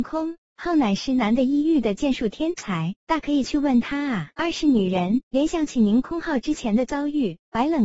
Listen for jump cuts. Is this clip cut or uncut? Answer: cut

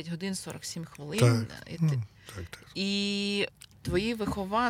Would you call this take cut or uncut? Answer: uncut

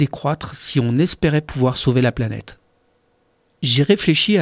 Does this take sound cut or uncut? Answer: uncut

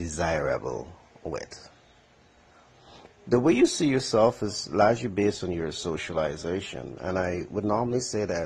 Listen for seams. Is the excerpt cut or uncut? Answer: cut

